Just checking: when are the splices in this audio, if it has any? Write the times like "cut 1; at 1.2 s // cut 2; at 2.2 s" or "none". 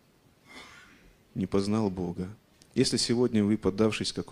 none